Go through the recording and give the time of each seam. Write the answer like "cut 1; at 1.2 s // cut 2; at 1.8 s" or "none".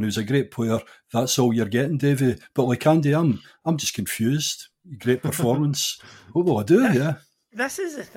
none